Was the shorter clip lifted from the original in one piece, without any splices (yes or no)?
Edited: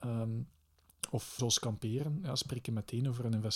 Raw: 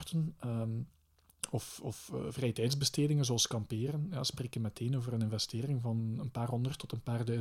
no